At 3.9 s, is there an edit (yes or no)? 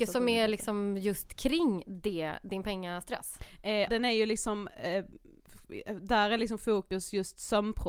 yes